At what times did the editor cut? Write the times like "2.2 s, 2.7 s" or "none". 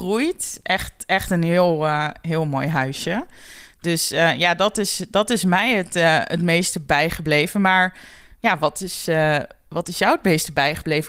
none